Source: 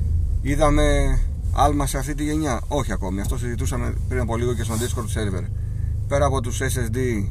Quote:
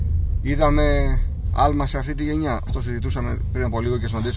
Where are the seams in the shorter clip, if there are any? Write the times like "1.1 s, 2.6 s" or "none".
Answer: 2.7 s